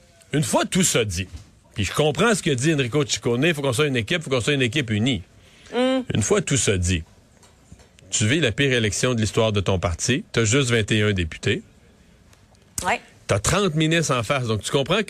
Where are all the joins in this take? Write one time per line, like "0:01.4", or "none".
0:10.3